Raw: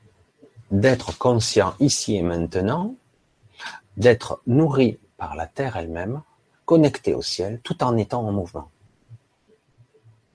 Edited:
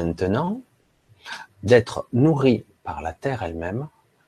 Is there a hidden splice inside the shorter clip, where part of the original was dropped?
no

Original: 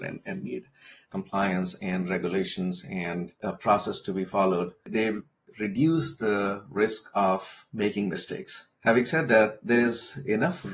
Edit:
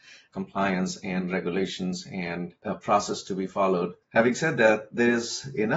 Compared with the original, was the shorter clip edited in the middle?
yes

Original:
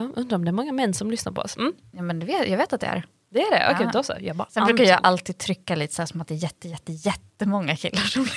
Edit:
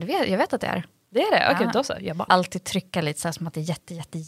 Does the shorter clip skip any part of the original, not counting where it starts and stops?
yes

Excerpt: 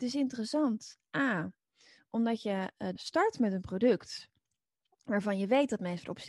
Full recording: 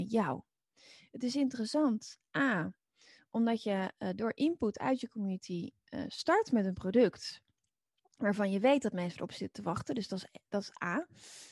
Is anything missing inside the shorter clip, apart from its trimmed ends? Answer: yes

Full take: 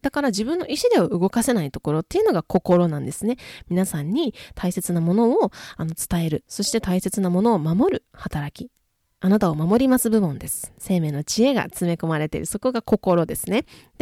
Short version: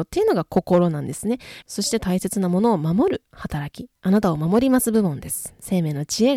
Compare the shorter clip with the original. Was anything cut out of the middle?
yes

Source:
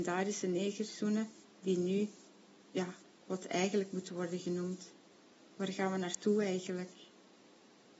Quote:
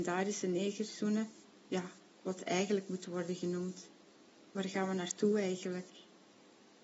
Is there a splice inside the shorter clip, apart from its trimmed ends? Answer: yes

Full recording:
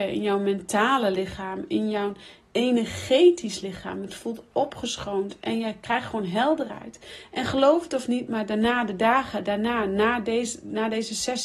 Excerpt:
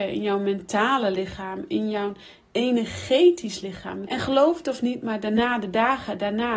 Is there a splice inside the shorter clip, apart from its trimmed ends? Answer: yes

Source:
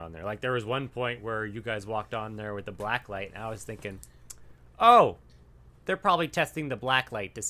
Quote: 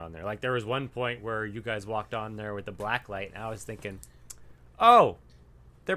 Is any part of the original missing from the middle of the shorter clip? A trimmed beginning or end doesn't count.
no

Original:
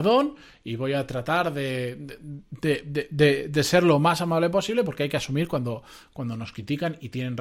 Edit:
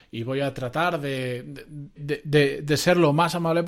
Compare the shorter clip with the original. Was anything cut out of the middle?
yes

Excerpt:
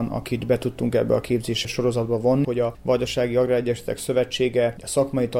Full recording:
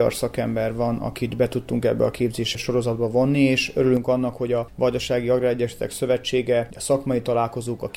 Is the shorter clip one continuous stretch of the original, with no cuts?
no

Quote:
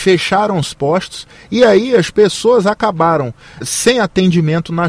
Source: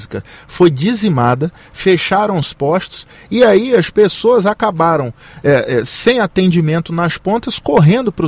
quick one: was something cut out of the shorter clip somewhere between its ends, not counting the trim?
yes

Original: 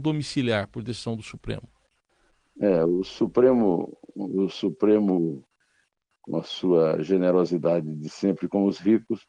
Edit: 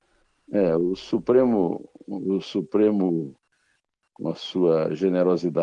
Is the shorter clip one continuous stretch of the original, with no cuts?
yes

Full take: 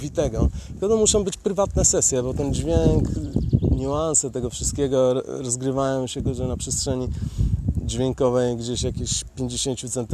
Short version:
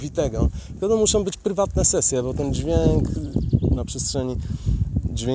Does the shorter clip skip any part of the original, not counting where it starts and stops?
yes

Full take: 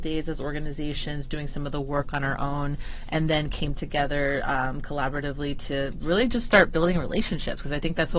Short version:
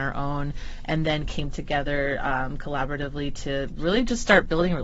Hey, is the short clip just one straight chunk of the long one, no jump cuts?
yes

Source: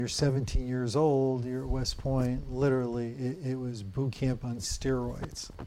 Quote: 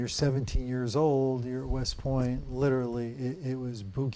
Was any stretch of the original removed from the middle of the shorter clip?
no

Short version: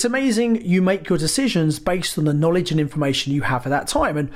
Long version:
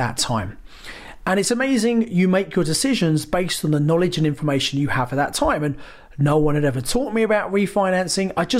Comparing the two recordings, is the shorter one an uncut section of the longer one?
yes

